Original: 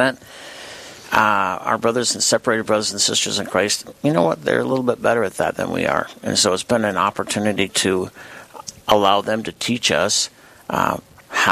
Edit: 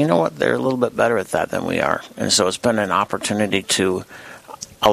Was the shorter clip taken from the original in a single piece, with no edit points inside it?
yes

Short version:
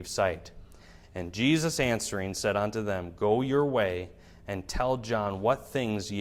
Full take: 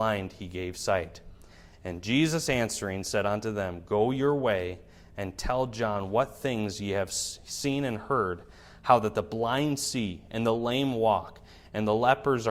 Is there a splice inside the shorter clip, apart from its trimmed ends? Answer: no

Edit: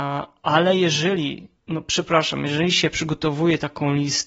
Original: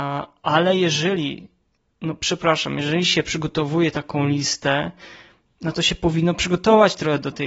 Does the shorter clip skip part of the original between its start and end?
yes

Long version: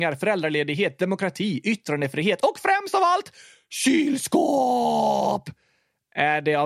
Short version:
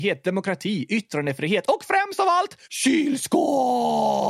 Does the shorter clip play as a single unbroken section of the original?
no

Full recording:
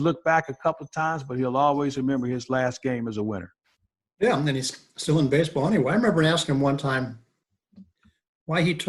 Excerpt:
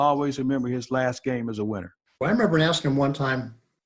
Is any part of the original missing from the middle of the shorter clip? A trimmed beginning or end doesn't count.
yes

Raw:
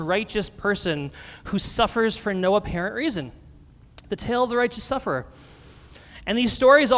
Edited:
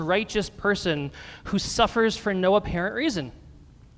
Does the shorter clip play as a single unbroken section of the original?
yes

